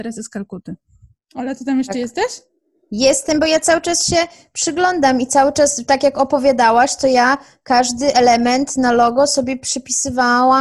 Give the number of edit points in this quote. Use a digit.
1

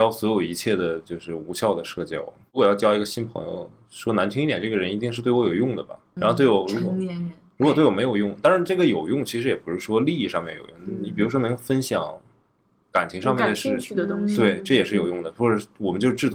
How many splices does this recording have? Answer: 1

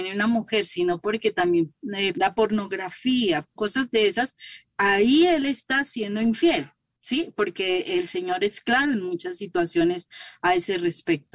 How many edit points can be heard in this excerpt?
2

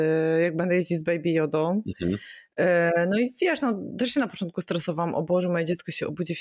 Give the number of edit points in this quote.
0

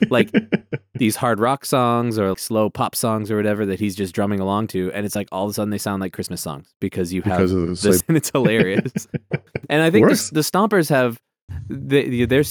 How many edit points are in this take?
2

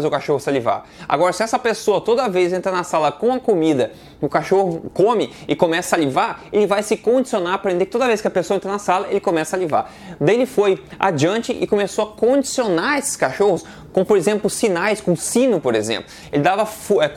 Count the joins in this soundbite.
0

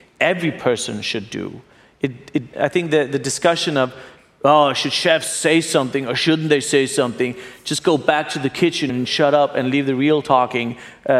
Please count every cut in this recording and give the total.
2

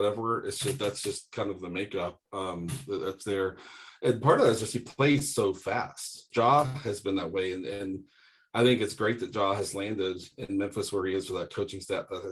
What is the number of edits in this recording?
1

